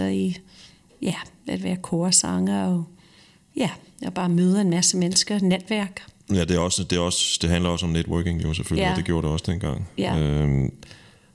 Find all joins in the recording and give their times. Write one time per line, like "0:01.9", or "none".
none